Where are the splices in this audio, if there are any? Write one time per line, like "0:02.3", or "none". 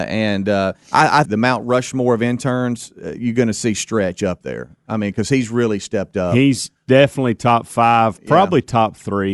0:01.2